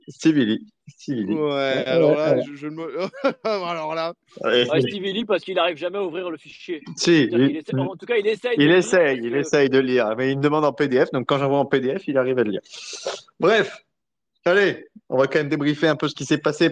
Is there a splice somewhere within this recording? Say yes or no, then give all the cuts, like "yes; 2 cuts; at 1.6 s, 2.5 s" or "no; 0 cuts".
no; 0 cuts